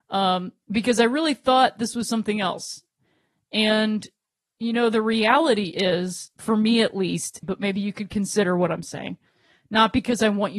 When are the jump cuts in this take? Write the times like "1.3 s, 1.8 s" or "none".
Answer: 7.4 s